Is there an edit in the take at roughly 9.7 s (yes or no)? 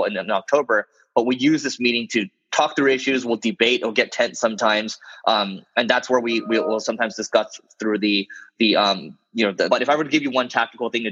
yes